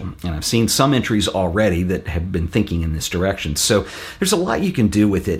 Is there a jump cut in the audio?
no; 0 cuts

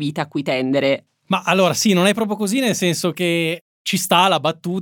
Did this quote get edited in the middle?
yes; 1 cut; at 1.1 s

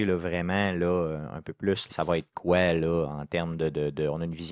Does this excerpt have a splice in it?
yes; 1 cut; at 1.9 s

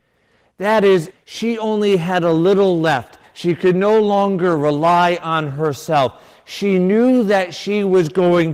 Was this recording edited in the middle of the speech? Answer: yes; 2 cuts; at 1.1 s, 3.2 s

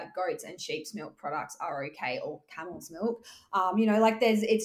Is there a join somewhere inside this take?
no; 0 cuts

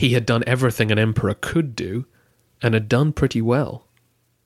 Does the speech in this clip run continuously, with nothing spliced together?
yes; 0 cuts

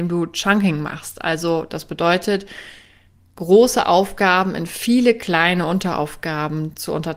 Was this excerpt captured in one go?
yes; 0 cuts

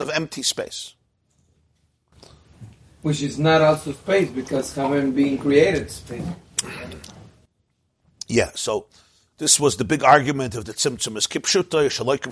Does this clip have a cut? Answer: no; 0 cuts

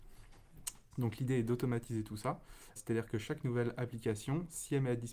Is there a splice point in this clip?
yes; 2 cuts; at 0.9 s, 2.8 s

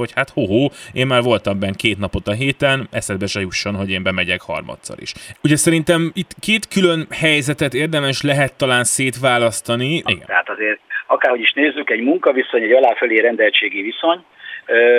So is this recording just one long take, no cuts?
no; 2 cuts; at 5.3 s, 10.1 s

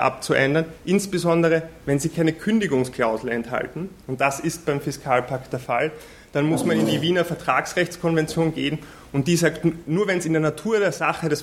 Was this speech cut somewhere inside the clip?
no; 0 cuts

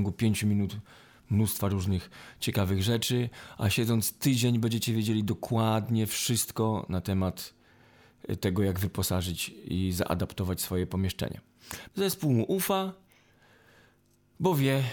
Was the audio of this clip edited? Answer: yes; 1 cut; at 11.9 s

